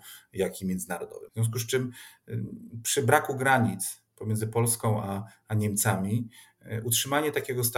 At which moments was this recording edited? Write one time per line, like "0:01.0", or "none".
0:01.3